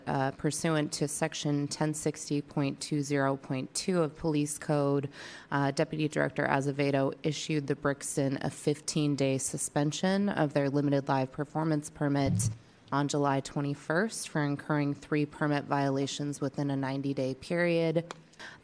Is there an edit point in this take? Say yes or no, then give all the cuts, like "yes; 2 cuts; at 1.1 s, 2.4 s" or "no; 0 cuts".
no; 0 cuts